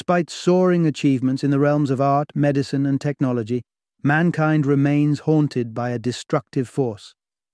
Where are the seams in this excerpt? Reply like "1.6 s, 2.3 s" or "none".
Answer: none